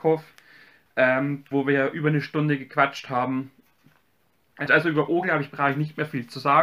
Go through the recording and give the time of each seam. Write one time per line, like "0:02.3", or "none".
0:01.5
0:04.7